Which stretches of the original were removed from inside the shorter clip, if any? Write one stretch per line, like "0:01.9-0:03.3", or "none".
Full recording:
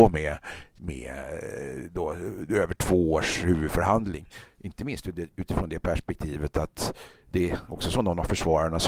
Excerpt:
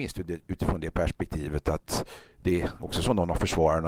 none